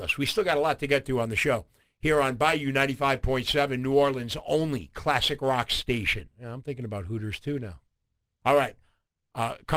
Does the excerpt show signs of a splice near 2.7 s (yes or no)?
no